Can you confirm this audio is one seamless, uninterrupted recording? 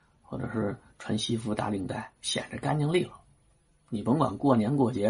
no; 1 cut; at 2.2 s

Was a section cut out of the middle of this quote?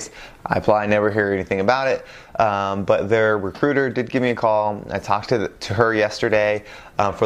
no; 0 cuts

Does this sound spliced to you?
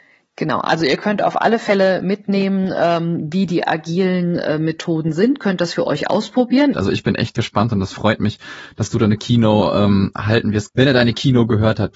yes; 2 cuts; at 6.7 s, 10.7 s

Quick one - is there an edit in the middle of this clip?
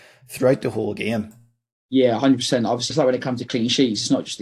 yes; 1 cut; at 2.9 s

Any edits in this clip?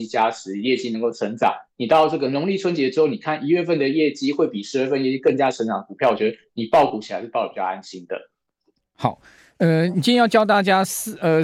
no; 0 cuts

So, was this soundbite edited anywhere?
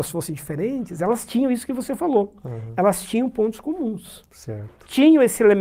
no; 0 cuts

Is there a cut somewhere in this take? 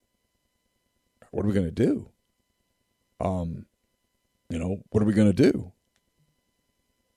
yes; 2 cuts; at 3.0 s, 4.9 s

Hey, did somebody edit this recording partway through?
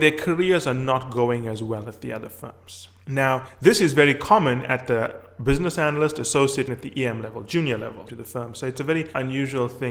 yes; 2 cuts; at 6.7 s, 8.1 s

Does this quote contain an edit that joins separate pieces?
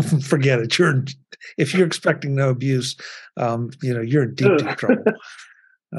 no; 0 cuts

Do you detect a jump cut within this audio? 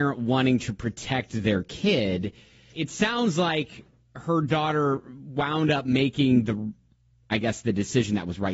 yes; 1 cut; at 2.7 s

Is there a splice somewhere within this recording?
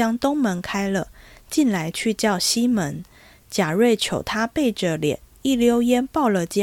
no; 0 cuts

